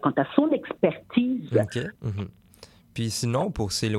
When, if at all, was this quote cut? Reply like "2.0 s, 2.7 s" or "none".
2.0 s